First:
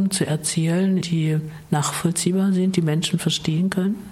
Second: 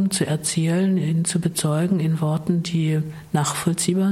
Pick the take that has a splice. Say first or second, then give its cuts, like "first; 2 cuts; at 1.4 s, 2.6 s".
first; 1 cut; at 1.0 s